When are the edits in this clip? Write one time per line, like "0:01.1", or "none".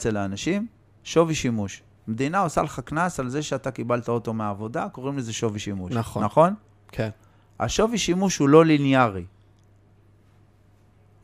none